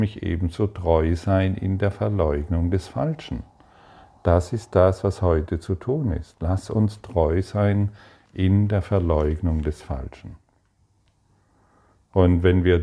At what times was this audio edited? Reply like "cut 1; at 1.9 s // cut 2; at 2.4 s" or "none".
none